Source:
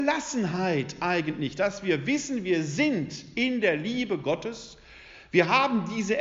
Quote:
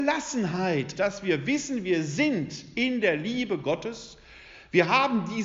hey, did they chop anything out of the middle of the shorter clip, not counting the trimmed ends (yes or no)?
yes